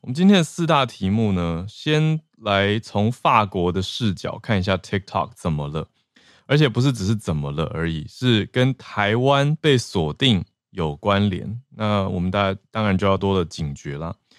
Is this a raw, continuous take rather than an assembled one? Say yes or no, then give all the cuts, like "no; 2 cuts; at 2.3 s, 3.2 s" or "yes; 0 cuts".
no; 1 cut; at 13.2 s